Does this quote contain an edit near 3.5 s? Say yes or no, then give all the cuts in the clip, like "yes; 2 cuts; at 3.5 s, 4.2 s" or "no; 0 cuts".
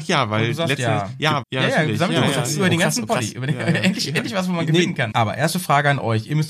no; 2 cuts; at 1.4 s, 5.1 s